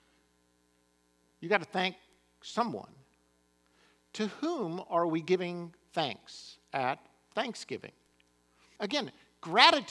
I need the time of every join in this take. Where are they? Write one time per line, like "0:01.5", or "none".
0:08.8

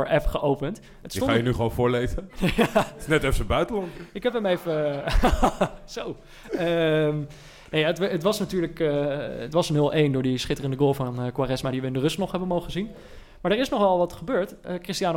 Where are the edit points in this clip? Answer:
none

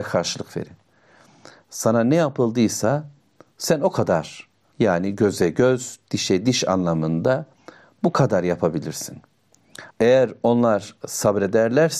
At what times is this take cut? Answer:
0:04.7
0:09.9

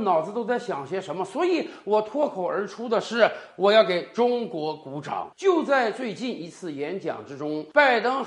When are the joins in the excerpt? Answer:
0:05.3

